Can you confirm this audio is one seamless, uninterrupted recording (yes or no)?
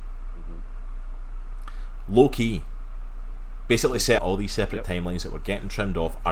no